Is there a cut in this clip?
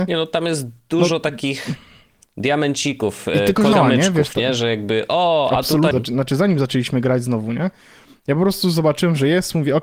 yes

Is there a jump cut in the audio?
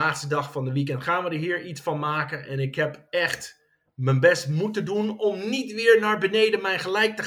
no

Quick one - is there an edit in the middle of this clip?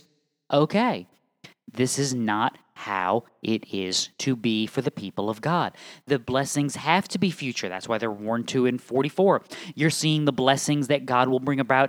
yes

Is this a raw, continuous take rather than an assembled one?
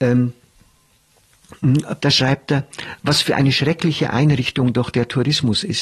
no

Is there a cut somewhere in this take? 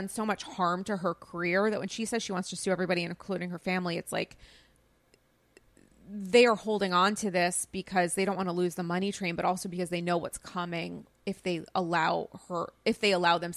no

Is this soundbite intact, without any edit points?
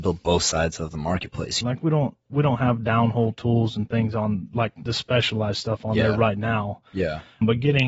no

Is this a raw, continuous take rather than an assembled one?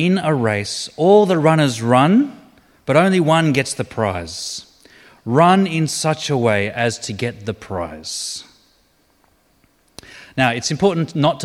yes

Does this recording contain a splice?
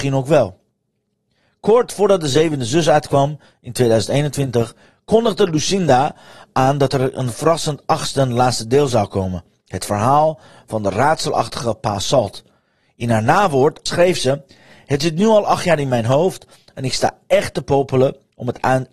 yes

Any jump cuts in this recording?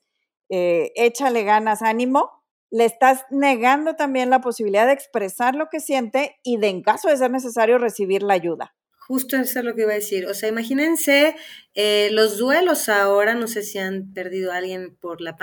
no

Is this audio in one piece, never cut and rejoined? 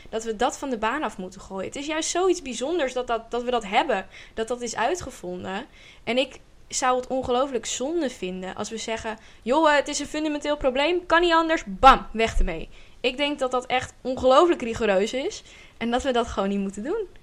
yes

